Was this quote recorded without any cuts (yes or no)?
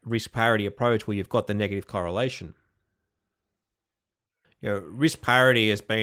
no